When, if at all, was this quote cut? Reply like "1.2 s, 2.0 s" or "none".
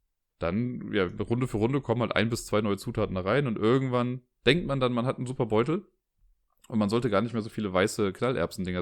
none